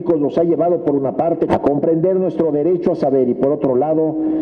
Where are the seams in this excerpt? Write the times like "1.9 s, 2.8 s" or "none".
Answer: 1.5 s